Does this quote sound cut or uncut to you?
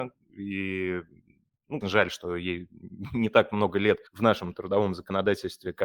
cut